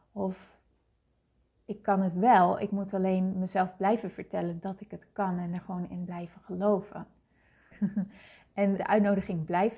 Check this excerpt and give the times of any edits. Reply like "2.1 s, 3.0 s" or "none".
7.7 s, 8.8 s